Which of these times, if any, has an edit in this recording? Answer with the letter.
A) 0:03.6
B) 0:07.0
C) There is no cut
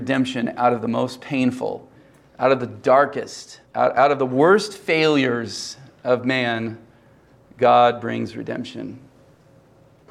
A